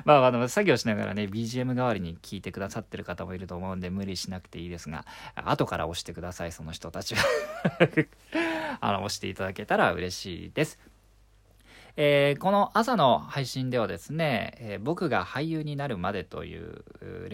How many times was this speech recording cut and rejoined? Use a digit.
0